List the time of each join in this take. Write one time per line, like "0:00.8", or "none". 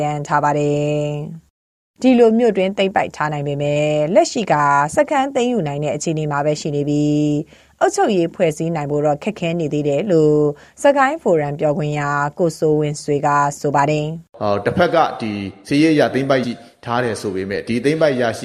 0:14.3
0:16.4